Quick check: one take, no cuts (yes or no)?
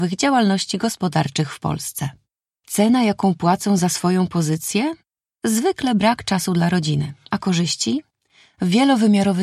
yes